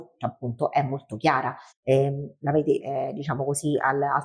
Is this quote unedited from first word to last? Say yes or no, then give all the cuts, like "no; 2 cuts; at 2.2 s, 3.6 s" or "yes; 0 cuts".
no; 2 cuts; at 1.7 s, 2.8 s